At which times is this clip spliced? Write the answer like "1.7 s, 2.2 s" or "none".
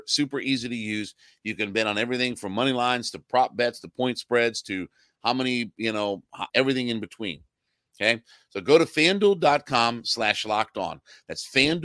6.5 s